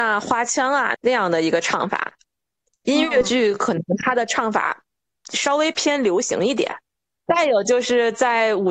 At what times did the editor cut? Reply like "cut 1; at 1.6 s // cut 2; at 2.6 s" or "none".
none